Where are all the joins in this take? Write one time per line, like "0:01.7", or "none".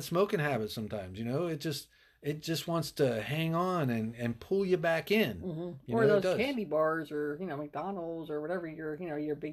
none